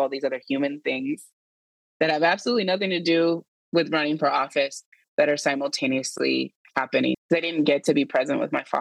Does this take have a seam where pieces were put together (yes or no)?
yes